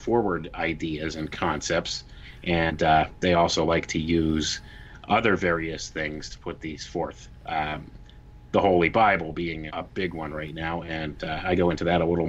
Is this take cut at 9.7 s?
yes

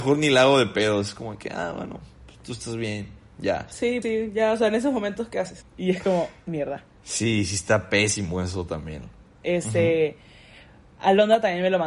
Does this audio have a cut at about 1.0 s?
no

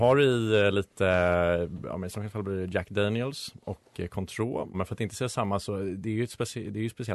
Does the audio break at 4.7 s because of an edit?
yes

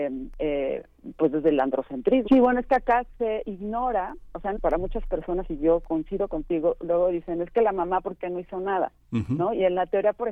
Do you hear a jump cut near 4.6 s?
yes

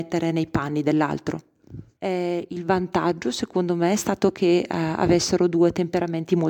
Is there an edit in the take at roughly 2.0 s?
yes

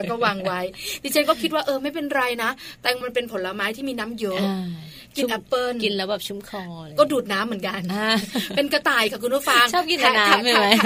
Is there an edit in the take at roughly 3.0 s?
yes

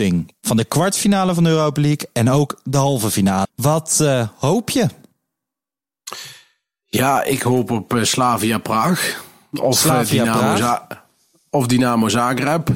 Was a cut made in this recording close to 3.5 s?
yes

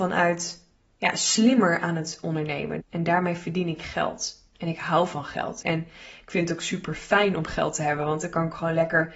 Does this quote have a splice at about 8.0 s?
no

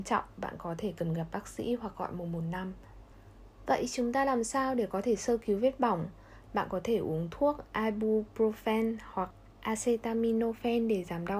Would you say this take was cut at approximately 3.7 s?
no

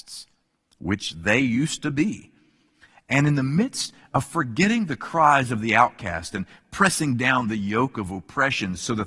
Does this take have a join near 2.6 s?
no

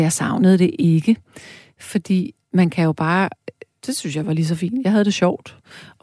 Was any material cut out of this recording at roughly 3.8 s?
yes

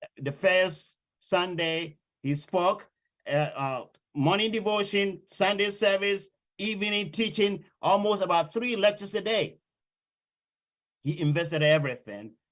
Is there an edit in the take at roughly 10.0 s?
no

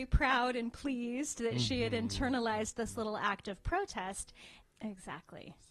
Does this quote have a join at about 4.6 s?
yes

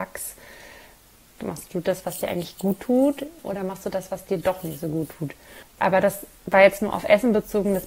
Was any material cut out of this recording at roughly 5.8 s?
yes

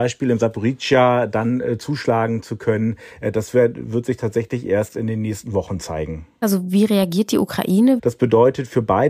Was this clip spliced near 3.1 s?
no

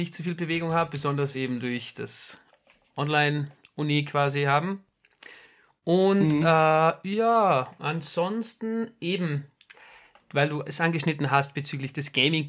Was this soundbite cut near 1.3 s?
no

